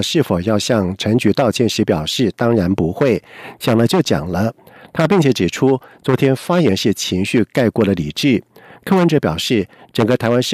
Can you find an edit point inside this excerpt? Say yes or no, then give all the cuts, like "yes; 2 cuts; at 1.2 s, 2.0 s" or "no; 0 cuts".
no; 0 cuts